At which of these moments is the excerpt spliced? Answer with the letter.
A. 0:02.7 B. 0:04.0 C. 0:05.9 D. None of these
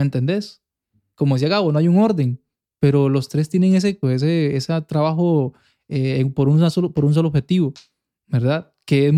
B